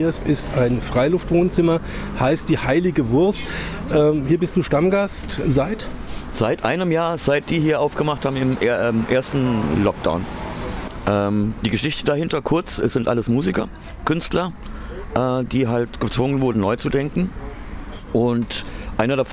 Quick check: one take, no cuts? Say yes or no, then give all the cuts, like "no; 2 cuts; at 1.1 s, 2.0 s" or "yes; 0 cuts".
yes; 0 cuts